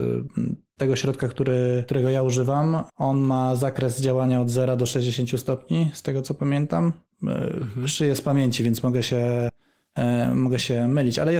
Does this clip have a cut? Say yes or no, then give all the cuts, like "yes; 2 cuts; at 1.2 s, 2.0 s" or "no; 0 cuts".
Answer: no; 0 cuts